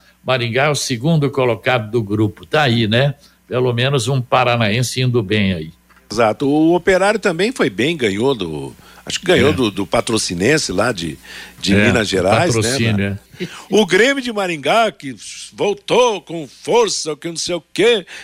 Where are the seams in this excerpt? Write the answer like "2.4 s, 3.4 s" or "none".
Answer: 13.3 s